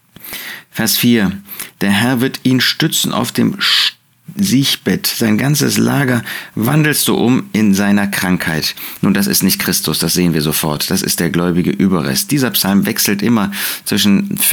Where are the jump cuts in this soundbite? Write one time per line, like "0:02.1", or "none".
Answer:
none